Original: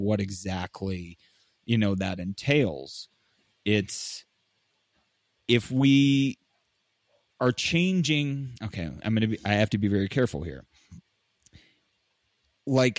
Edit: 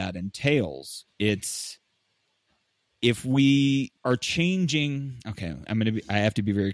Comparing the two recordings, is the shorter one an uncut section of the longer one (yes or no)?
no